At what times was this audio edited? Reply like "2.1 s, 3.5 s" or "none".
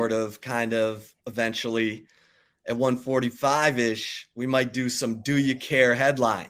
1.2 s